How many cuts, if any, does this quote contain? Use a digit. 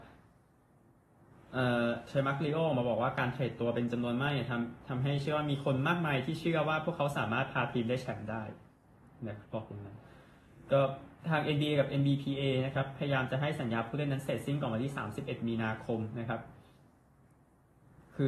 2